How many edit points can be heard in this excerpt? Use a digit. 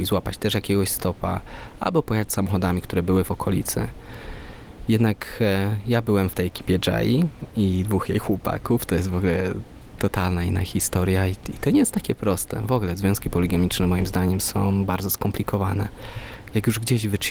0